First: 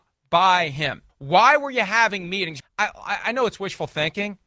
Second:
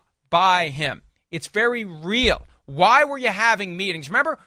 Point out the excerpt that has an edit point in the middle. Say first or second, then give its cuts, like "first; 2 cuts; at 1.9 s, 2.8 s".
first; 2 cuts; at 1.1 s, 2.6 s